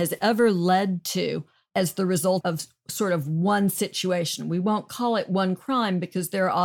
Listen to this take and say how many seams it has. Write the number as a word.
one